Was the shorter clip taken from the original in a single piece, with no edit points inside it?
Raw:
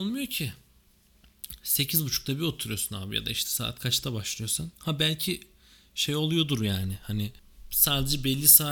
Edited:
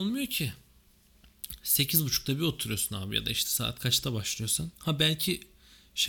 yes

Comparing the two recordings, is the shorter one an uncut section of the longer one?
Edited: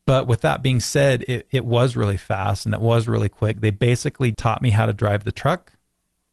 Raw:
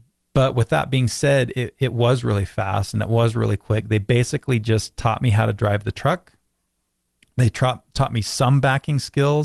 no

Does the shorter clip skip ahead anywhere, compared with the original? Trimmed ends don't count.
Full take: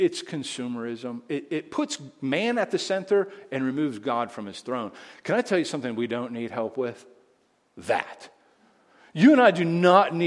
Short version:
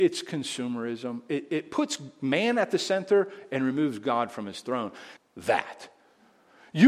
yes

